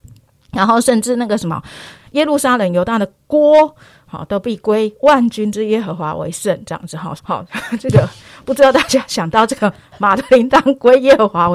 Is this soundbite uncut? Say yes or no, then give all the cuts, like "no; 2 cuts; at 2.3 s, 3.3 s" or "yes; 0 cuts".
no; 1 cut; at 7.2 s